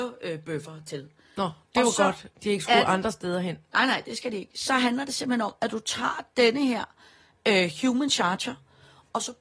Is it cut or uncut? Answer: uncut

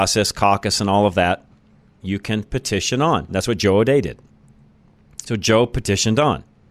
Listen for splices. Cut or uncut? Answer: cut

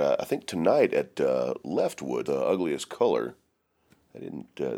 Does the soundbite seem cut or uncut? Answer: cut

